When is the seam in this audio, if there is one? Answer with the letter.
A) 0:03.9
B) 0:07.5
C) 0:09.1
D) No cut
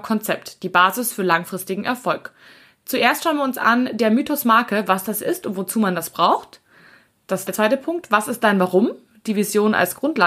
B